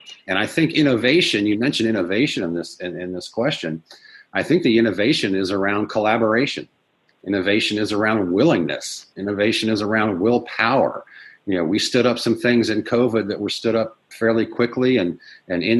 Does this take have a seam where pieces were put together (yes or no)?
no